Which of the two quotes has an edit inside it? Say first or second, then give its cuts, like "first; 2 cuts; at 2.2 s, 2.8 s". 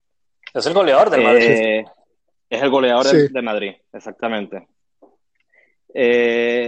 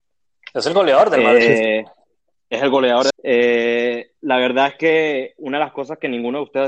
second; 2 cuts; at 3.1 s, 4.2 s